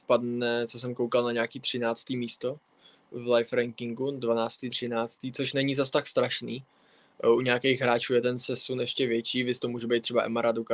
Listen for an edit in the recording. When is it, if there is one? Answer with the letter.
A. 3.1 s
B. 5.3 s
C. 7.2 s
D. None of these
D